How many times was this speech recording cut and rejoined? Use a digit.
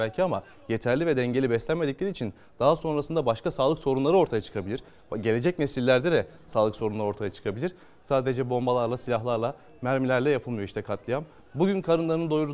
1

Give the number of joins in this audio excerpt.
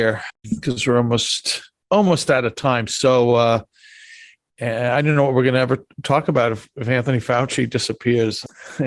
0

